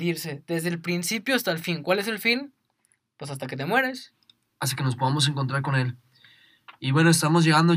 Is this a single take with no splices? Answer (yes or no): yes